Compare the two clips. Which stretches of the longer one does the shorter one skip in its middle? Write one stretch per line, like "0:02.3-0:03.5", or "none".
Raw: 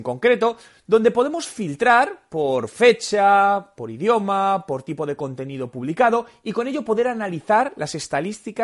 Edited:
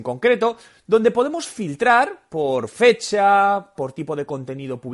0:03.7-0:04.6